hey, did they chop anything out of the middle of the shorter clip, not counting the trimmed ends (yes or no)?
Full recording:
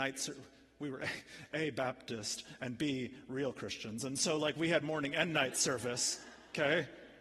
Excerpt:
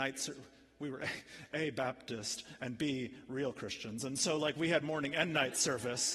no